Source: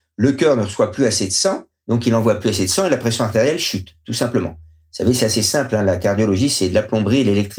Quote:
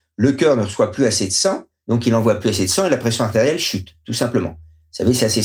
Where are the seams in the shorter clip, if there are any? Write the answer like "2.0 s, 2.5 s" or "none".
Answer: none